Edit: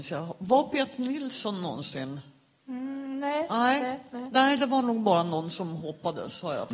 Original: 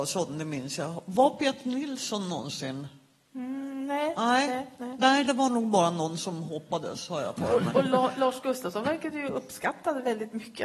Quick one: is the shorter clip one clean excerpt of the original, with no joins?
yes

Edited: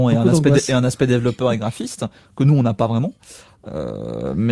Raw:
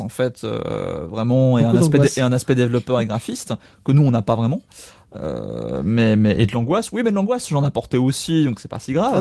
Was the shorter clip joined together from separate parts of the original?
no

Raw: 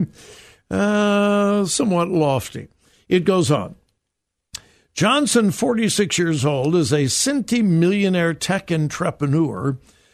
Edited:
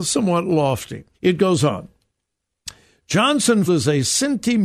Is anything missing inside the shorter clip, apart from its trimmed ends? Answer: yes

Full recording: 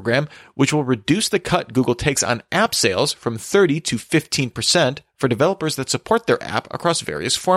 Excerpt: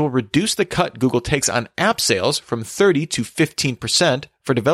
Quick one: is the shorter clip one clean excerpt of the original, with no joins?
yes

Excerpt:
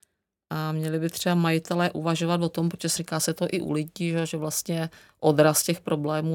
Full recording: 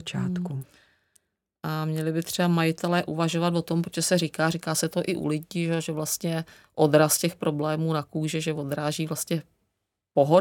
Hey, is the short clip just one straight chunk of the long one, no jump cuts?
no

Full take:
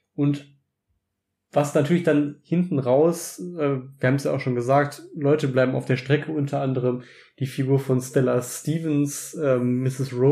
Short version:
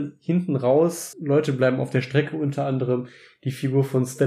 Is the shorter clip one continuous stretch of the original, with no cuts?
no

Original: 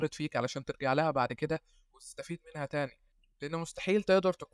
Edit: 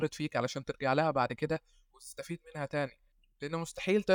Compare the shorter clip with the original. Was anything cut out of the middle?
no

